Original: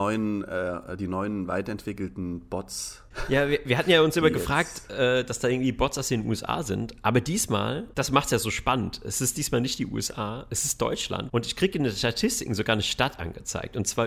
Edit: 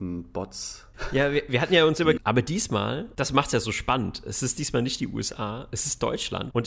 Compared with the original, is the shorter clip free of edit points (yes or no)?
no